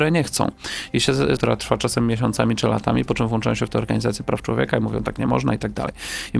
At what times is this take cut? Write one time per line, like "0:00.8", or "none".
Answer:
0:01.4